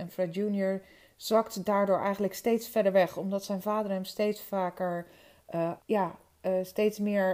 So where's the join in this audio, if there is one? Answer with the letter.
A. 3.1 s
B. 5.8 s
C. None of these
B